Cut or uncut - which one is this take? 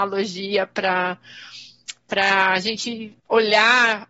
cut